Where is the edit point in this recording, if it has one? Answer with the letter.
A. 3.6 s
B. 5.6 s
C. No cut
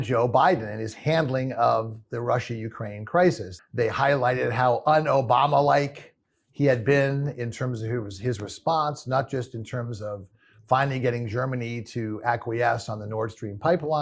A